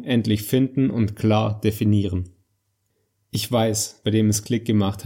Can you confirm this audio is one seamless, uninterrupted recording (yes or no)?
no